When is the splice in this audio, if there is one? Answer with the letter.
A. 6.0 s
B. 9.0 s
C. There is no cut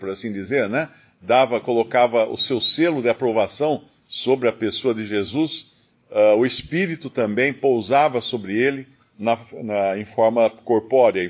C